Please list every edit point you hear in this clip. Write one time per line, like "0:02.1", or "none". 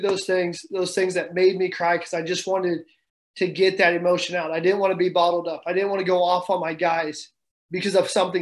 none

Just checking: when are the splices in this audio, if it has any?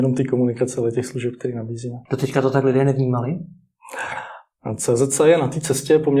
0:02.1

